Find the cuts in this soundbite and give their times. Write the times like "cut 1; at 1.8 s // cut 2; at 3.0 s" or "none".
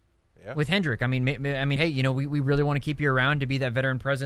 cut 1; at 1.8 s